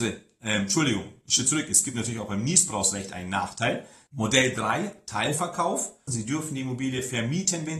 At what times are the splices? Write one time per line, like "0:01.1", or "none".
0:04.1
0:06.1